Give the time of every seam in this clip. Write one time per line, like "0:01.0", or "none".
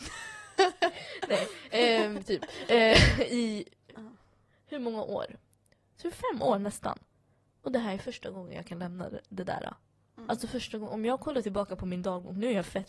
none